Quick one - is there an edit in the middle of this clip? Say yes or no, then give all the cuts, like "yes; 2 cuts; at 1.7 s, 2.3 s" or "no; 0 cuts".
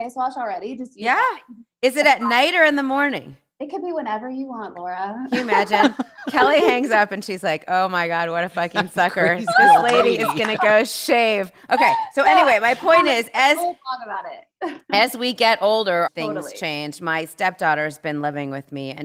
yes; 1 cut; at 16.1 s